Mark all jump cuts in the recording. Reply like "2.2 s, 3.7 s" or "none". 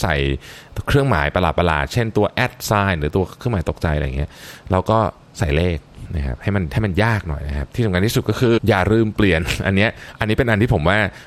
8.6 s